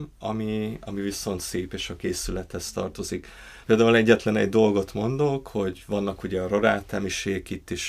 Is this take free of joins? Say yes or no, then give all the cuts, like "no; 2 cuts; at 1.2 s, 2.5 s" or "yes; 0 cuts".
no; 1 cut; at 3.6 s